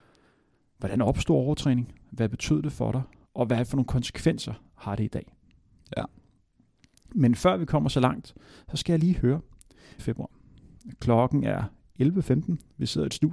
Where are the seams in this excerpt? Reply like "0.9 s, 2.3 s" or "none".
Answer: 10.0 s